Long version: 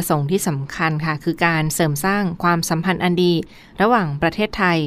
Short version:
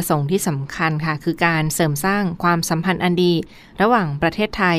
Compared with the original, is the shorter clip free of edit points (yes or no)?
yes